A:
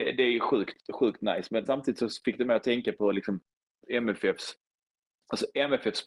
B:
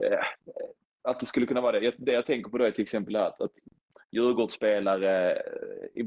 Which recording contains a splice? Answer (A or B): A